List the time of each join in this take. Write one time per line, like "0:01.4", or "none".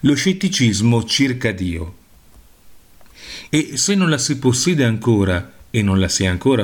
0:03.5

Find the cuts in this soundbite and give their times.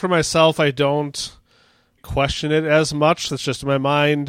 0:02.0
0:03.3

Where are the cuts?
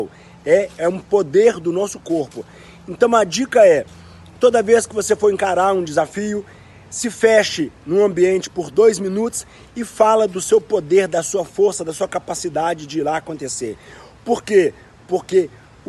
none

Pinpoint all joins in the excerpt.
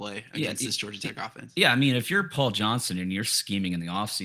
none

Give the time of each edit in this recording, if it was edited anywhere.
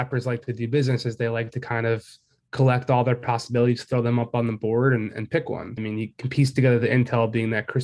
0:05.8

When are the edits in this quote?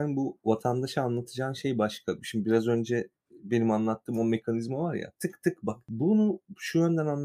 0:05.2

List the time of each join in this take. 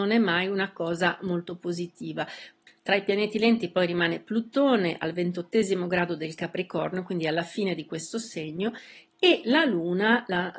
0:02.7

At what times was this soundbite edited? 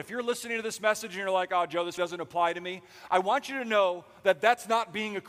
0:02.0

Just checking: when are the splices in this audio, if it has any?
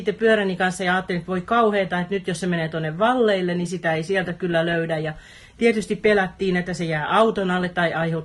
none

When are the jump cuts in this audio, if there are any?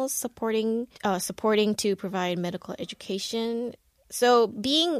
0:00.9

